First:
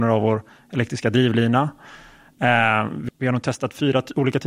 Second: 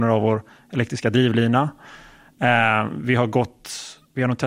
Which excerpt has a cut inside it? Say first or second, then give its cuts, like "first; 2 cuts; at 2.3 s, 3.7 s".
first; 1 cut; at 3.1 s